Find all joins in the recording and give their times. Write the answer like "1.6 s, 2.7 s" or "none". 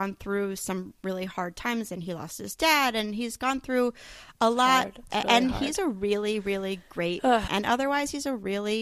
7.5 s